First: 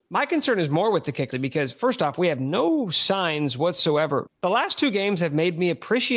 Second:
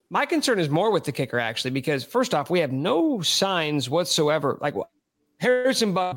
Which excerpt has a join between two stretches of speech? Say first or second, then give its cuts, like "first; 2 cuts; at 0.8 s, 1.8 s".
first; 2 cuts; at 1.3 s, 4.3 s